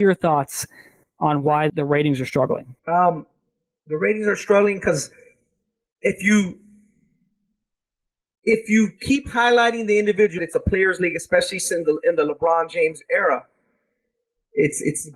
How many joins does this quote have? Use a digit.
3